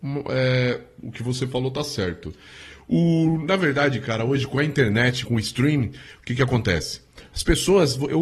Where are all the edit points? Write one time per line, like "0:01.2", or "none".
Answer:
0:05.2